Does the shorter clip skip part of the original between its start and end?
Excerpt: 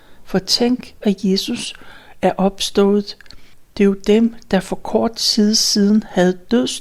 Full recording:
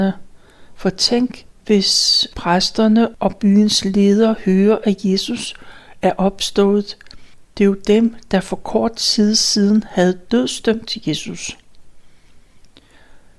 yes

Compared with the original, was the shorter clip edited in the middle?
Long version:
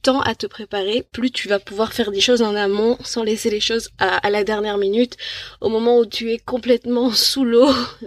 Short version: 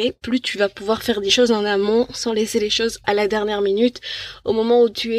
yes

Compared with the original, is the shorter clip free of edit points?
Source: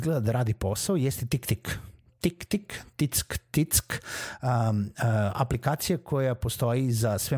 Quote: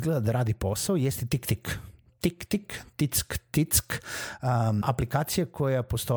no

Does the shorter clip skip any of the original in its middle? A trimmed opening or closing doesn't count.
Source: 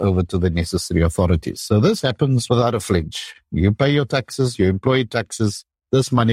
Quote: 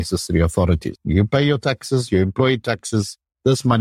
yes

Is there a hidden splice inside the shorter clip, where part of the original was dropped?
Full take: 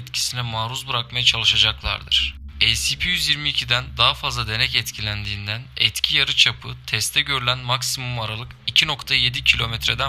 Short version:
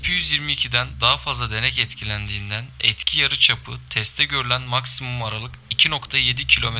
no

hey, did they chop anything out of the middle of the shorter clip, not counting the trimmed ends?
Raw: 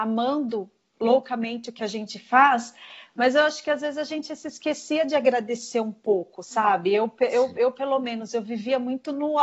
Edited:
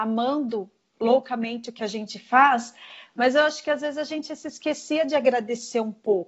no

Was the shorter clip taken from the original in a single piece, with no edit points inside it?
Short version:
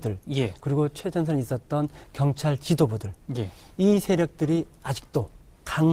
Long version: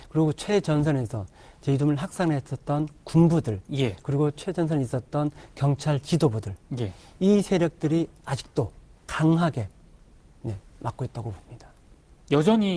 yes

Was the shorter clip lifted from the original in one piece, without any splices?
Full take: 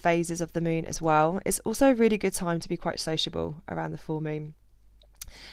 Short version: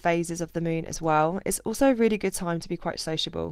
yes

